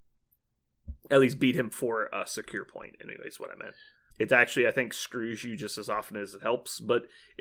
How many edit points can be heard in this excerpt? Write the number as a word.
two